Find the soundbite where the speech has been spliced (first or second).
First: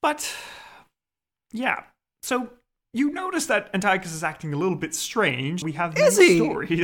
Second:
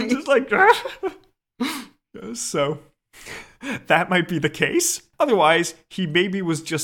first